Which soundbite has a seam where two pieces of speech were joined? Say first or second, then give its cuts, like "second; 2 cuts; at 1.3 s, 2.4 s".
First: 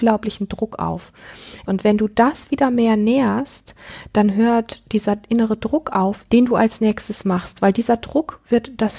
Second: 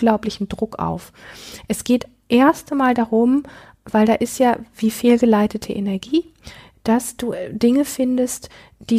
first; 2 cuts; at 1.7 s, 6.3 s